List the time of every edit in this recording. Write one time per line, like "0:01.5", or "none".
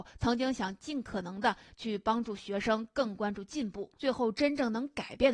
0:04.0